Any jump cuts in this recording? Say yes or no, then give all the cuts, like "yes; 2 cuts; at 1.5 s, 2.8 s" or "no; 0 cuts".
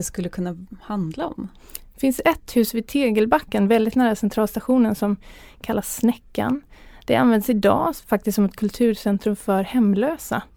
no; 0 cuts